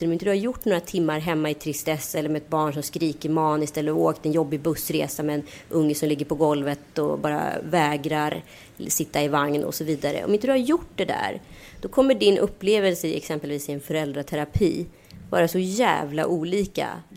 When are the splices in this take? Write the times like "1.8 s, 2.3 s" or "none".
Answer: none